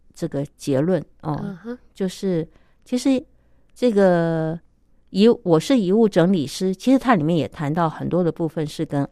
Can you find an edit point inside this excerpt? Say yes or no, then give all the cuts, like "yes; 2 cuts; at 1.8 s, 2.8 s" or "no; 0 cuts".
no; 0 cuts